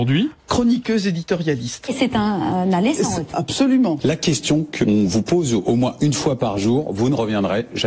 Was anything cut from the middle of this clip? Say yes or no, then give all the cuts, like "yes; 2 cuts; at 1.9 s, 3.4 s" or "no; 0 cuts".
yes; 1 cut; at 3.3 s